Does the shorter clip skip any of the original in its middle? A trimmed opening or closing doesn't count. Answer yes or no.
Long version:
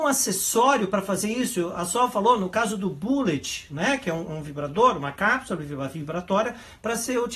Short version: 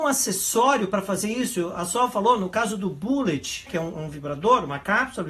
yes